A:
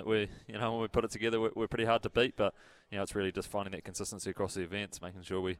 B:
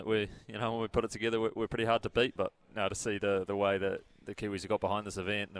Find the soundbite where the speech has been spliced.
B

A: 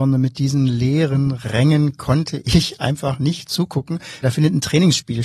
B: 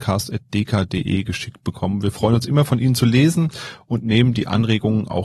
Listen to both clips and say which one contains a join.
A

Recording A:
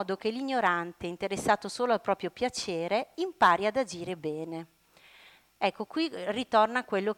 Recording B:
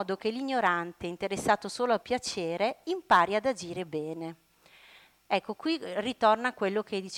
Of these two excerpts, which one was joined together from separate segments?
B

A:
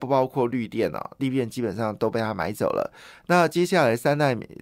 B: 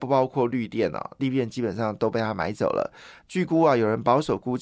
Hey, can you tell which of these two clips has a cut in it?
B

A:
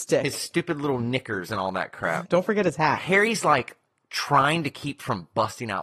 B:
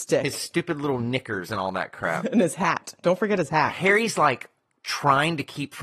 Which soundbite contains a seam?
A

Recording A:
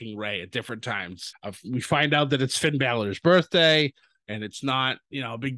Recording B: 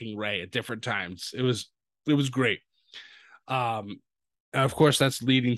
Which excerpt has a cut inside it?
A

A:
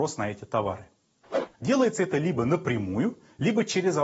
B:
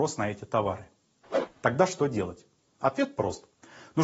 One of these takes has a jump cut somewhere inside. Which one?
A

